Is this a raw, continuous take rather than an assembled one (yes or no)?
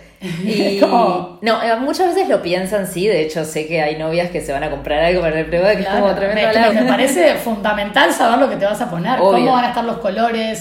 no